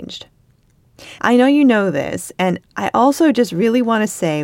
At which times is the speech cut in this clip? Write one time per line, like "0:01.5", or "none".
0:01.2